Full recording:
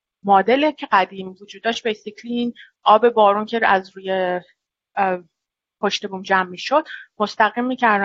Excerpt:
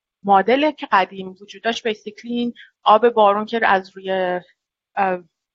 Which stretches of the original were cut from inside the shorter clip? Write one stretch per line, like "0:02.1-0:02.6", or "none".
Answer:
none